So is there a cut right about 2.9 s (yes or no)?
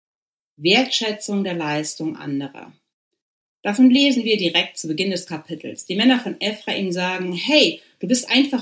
no